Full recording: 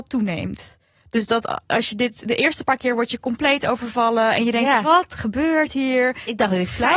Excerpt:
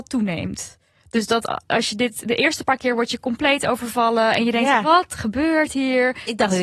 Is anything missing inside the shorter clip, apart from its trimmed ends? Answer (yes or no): no